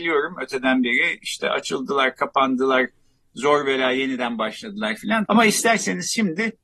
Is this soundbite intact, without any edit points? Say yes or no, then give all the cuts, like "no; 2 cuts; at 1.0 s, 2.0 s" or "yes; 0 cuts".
no; 1 cut; at 5.3 s